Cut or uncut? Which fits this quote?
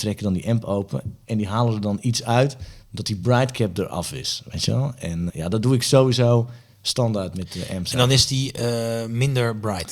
cut